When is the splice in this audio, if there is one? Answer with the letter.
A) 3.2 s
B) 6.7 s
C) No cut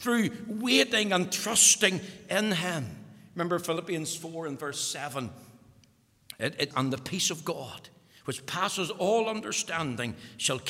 B